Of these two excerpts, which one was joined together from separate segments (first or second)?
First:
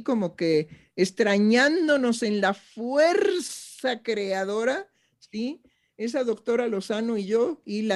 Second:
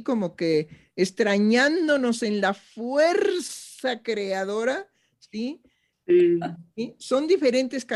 second